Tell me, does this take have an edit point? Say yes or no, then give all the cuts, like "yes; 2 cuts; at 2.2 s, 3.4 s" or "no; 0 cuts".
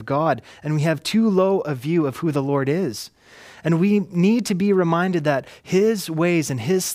no; 0 cuts